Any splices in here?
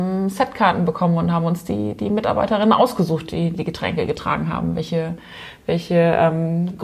yes; 1 cut; at 3.5 s

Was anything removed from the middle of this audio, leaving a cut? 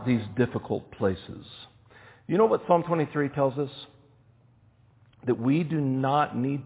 no; 0 cuts

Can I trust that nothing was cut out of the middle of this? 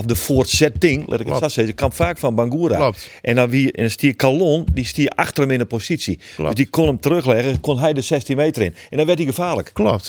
yes; 0 cuts

